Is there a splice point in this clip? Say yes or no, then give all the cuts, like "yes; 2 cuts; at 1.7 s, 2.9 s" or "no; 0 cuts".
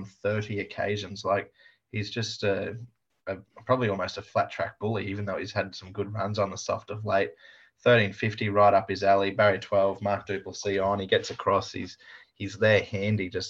no; 0 cuts